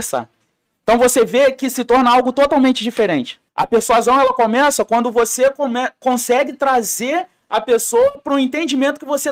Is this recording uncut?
no; 1 cut; at 3.5 s

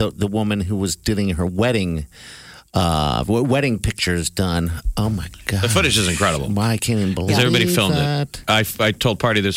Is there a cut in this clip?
no; 0 cuts

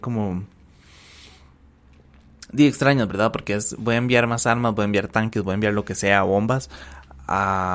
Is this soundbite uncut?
yes; 0 cuts

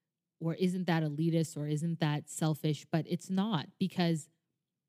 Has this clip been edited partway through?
no; 0 cuts

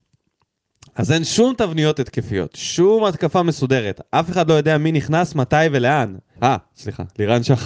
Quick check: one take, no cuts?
no; 1 cut; at 6.3 s

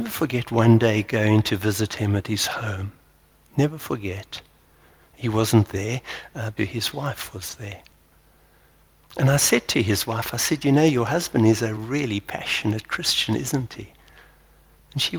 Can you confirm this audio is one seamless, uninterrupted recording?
no; 2 cuts; at 6.6 s, 11.8 s

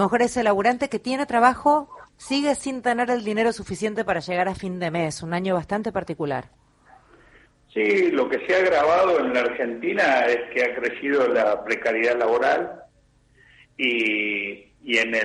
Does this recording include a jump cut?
no; 0 cuts

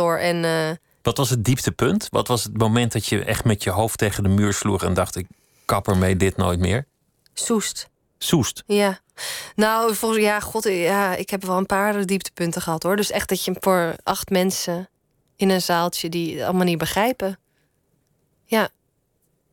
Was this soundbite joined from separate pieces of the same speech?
no; 0 cuts

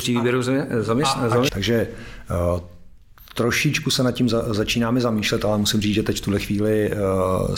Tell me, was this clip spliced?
yes; 1 cut; at 1.5 s

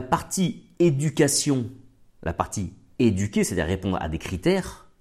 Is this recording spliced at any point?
no; 0 cuts

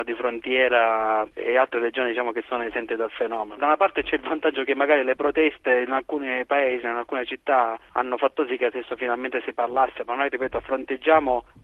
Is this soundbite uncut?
yes; 0 cuts

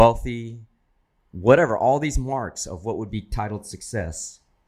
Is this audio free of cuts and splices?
no; 1 cut; at 1.3 s

